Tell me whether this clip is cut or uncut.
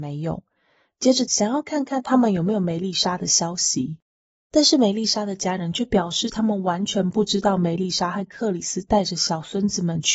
cut